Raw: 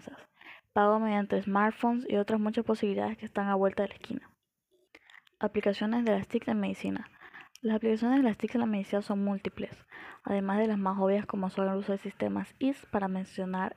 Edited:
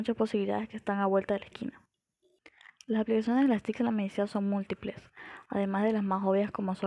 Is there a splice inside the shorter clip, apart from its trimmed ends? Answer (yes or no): yes